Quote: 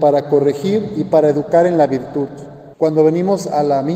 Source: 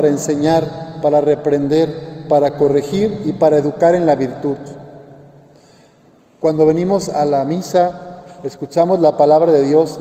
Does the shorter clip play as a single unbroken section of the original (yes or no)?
no